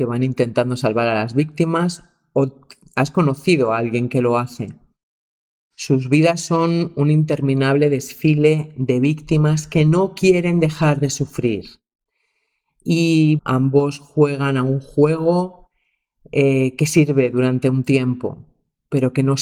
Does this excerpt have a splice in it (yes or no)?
yes